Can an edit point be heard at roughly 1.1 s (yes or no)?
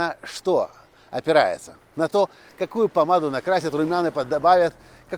no